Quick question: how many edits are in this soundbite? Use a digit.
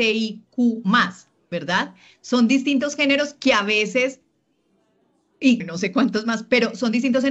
1